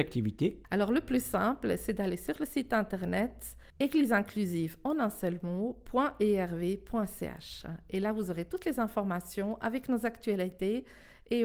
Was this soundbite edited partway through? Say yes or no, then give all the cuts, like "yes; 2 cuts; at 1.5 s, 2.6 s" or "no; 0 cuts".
no; 0 cuts